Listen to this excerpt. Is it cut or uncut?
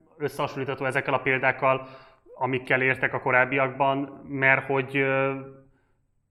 uncut